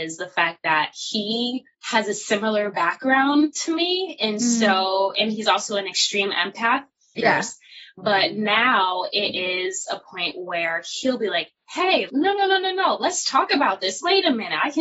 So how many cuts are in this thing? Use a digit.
3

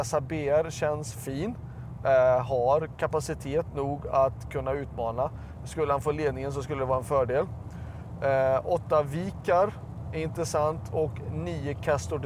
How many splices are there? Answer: 0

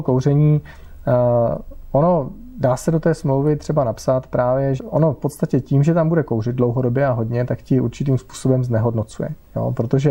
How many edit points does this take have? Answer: 1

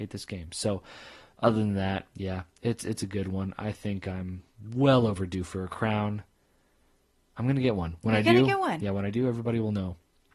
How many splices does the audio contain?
0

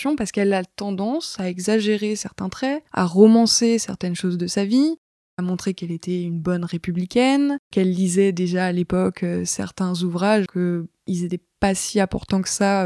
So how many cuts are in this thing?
2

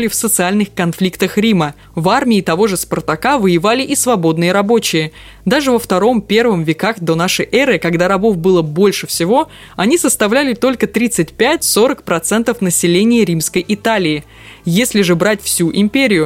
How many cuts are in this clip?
0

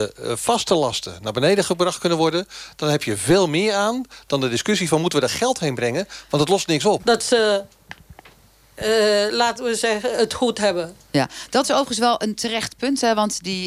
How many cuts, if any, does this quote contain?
1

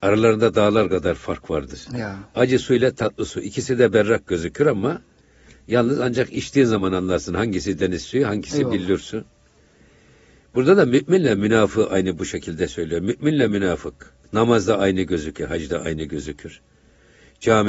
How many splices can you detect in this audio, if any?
2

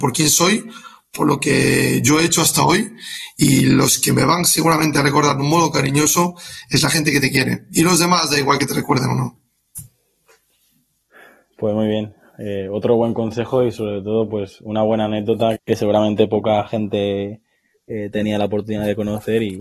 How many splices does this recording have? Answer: 1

